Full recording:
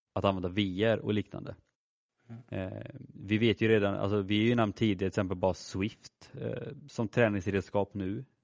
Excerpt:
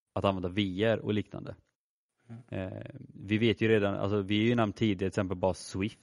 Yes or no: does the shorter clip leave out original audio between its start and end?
no